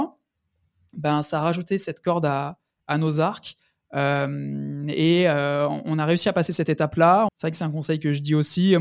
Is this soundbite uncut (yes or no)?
no